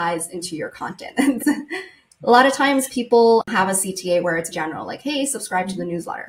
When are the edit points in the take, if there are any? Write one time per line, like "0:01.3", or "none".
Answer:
0:01.4
0:04.5